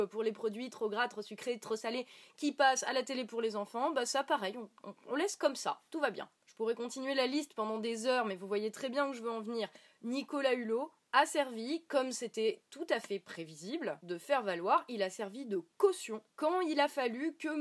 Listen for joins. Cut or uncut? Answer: uncut